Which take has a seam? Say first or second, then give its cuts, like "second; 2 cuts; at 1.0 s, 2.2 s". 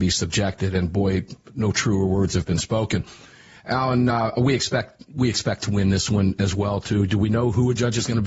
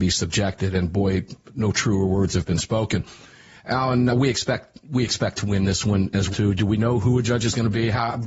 second; 2 cuts; at 4.1 s, 6.3 s